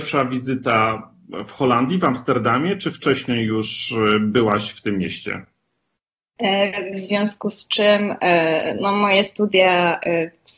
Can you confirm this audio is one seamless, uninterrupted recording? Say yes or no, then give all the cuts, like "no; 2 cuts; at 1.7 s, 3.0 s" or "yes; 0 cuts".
no; 1 cut; at 6.9 s